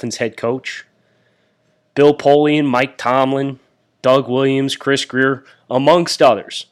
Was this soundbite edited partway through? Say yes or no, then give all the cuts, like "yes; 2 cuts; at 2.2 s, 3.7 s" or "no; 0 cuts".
no; 0 cuts